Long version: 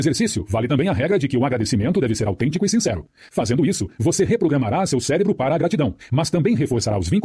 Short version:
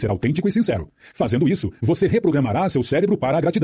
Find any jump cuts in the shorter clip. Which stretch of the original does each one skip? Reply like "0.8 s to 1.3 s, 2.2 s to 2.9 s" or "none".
none